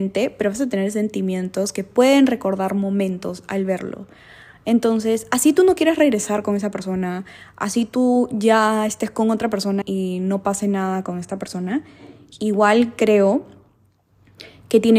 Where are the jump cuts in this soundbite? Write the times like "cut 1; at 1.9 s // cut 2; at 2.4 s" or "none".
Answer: cut 1; at 9.8 s